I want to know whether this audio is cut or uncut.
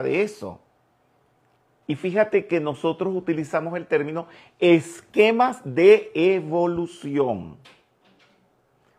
cut